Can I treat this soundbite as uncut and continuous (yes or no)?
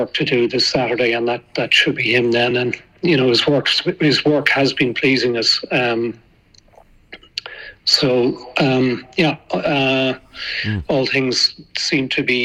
yes